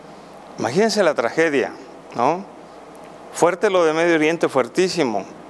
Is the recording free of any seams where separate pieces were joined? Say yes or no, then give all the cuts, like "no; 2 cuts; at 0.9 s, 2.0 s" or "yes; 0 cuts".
yes; 0 cuts